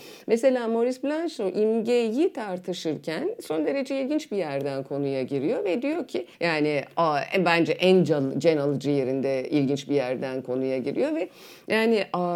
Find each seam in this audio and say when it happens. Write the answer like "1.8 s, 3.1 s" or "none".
6.3 s